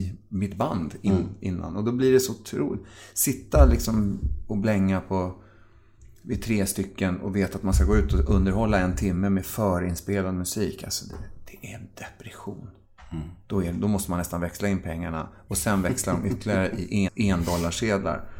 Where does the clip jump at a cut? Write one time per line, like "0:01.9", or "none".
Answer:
0:17.1